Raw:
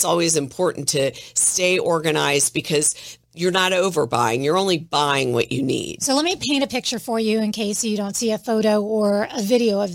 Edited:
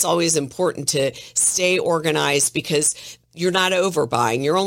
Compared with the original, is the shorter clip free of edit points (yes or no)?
yes